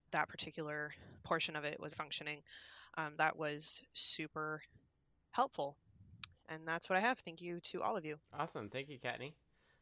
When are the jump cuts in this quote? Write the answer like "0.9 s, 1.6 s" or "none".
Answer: 1.9 s, 3.2 s, 8.2 s